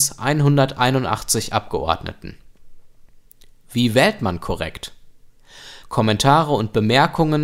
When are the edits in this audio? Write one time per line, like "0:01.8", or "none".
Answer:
0:05.8